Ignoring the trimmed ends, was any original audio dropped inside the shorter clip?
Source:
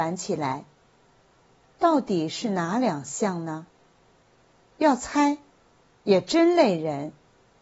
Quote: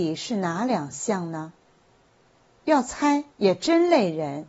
yes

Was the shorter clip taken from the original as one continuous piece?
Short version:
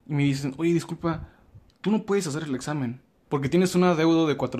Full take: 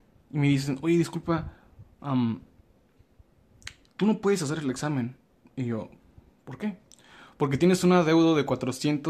no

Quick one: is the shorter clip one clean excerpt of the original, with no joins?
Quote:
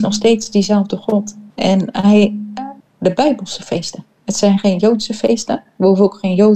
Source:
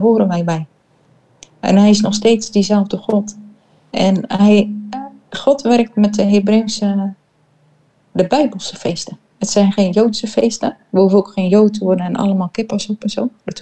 no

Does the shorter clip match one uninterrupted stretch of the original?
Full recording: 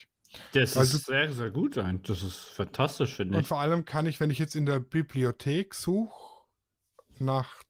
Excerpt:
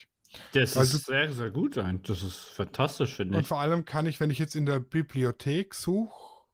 yes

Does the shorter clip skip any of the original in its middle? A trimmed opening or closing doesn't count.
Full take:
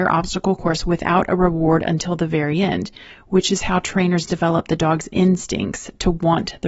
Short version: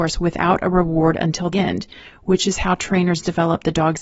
yes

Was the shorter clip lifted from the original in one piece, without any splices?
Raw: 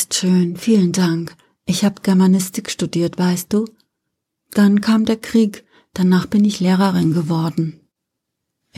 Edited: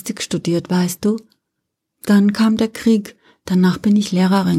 yes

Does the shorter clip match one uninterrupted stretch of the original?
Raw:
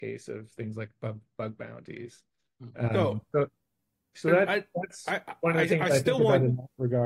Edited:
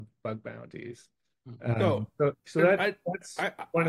no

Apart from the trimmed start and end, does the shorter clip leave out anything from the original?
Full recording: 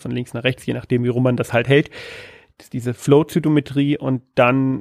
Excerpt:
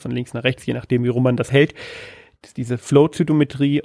yes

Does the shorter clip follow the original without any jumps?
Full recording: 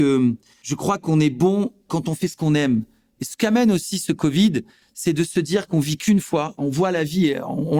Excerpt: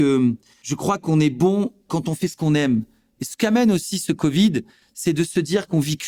yes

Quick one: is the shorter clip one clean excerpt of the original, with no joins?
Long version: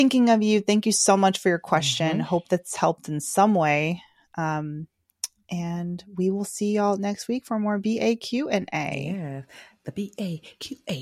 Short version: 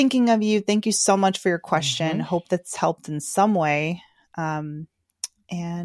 yes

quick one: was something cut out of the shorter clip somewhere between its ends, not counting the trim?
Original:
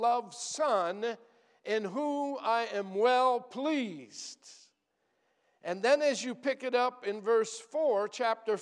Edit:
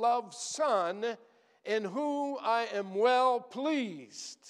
no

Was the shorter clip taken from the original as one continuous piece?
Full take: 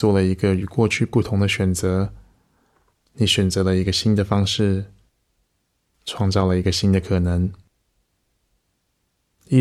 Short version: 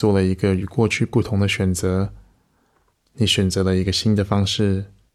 yes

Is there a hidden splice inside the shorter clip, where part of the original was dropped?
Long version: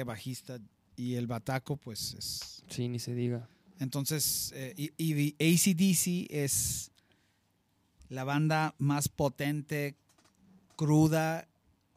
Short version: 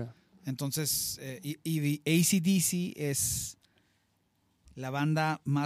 no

